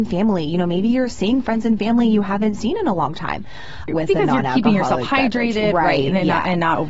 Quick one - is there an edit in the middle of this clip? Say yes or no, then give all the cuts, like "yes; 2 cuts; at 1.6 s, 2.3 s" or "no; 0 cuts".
yes; 1 cut; at 3.9 s